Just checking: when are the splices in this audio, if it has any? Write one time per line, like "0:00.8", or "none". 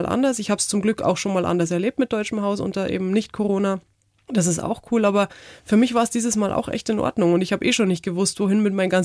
none